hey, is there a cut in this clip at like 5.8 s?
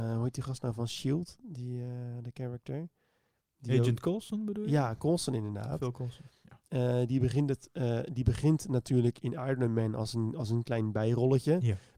no; 0 cuts

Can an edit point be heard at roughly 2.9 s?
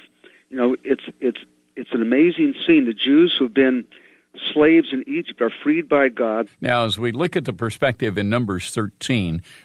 no; 1 cut; at 6.5 s

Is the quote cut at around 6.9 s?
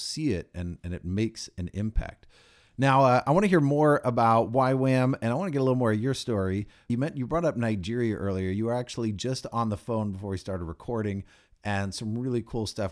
yes; 1 cut; at 6.9 s

